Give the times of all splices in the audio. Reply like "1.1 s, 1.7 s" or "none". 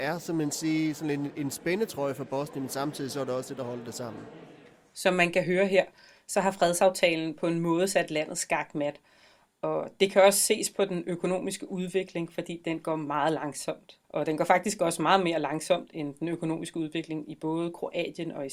14.0 s